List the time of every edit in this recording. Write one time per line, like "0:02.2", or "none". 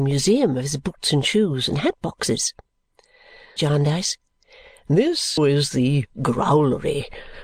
0:03.6
0:05.4